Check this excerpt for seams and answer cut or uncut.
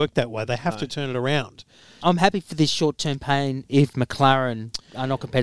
cut